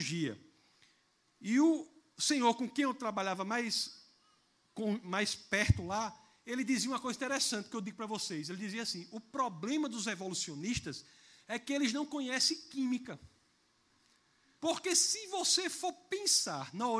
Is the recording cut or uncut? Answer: cut